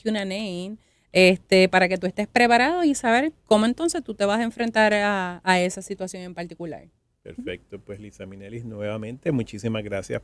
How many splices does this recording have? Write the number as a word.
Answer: zero